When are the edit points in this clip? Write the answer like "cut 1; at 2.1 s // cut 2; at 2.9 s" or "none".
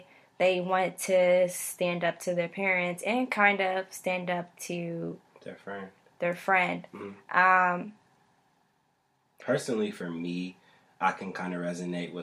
none